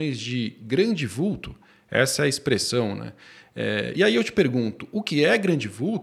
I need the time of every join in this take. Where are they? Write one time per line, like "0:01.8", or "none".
none

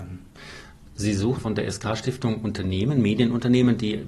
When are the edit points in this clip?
0:01.4

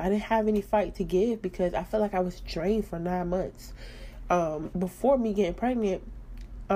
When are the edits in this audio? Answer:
0:04.7

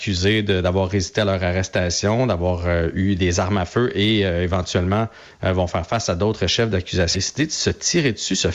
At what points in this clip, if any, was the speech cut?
0:07.1

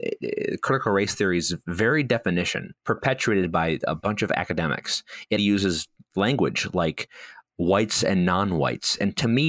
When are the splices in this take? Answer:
0:02.8
0:05.4

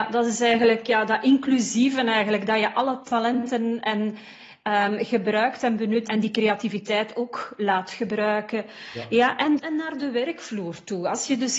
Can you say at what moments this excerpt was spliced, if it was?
0:06.1
0:09.6

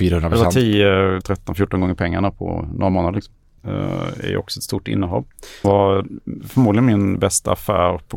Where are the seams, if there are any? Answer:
0:01.2
0:03.6
0:05.6

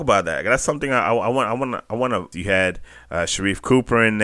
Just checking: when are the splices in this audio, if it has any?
0:02.3

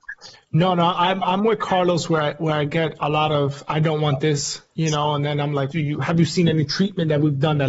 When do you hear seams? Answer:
0:05.7

